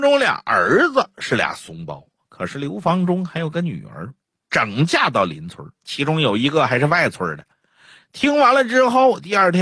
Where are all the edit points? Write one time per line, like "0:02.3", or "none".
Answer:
0:05.7